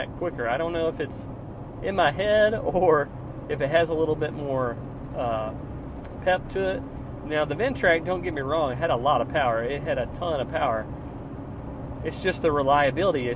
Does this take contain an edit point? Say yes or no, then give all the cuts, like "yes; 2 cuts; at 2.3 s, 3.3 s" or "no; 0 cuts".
no; 0 cuts